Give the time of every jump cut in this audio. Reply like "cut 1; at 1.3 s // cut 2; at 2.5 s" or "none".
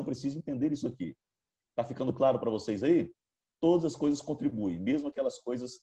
none